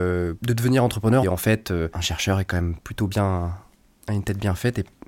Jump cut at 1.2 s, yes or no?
yes